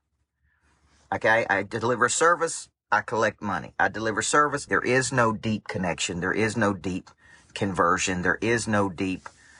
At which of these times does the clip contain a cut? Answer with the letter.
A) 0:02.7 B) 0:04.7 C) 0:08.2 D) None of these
B